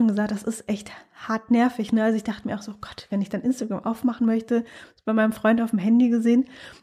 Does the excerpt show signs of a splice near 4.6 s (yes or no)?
no